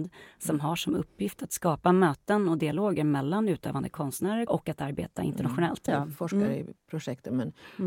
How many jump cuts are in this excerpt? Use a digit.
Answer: 2